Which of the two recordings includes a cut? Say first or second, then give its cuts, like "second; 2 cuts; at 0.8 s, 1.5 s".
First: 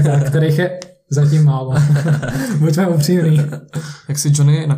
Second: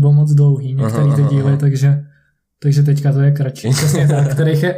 second; 1 cut; at 3.6 s